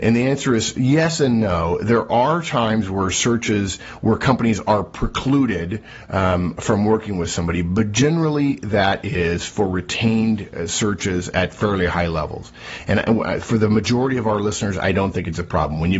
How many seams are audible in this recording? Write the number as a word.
zero